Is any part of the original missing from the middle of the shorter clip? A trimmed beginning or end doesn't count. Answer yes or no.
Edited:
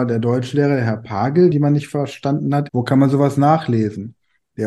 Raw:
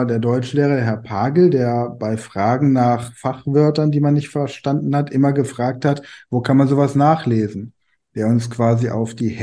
yes